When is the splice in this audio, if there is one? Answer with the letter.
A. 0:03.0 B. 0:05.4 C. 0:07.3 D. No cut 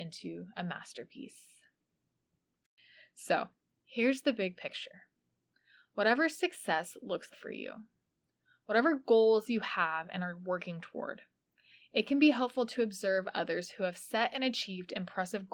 C